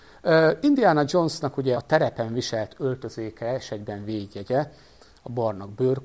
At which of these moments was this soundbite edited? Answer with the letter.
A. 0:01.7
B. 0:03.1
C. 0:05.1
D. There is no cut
A